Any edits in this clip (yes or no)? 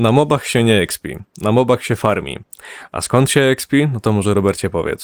no